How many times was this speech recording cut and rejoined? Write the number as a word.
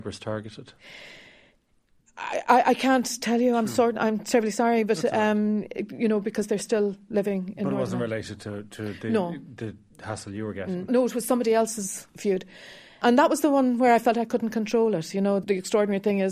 one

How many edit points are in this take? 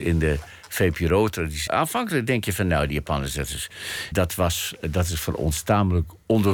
two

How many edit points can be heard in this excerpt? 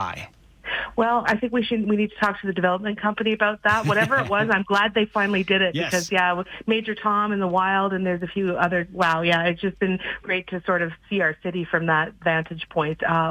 two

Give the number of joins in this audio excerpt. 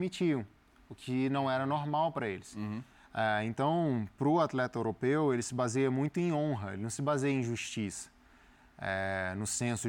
zero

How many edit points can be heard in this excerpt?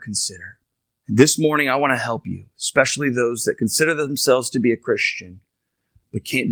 one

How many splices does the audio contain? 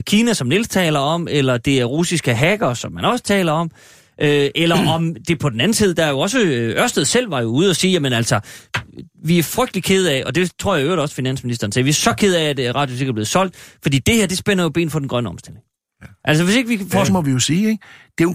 one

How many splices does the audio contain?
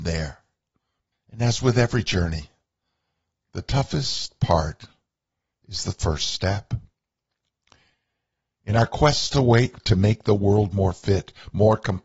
one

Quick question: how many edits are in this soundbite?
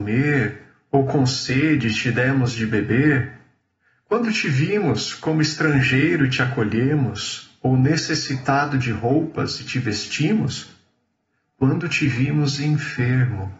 zero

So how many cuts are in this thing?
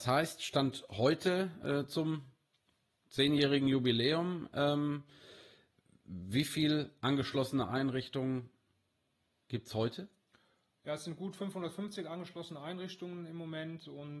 zero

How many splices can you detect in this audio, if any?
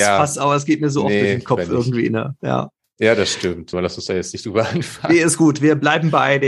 one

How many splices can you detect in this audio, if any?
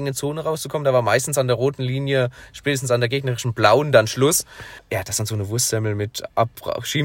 one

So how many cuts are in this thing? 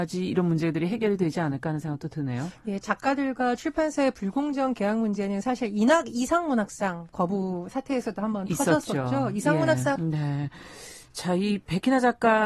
one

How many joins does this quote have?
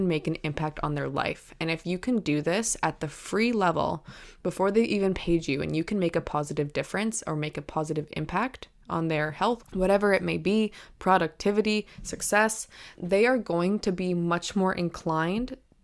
two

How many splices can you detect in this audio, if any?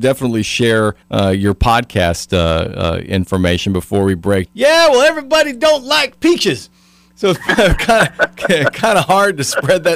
two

